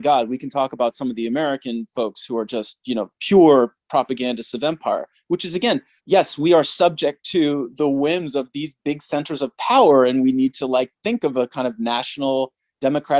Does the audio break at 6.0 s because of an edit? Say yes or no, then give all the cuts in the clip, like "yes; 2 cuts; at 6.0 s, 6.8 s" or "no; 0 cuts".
yes; 1 cut; at 6.0 s